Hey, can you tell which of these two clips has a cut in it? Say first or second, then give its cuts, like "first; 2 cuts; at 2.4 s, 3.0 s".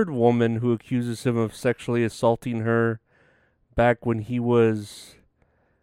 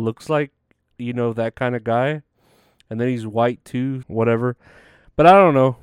second; 1 cut; at 4.0 s